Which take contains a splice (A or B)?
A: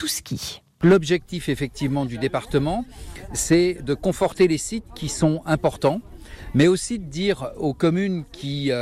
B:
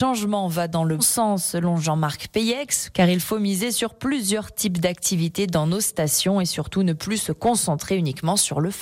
B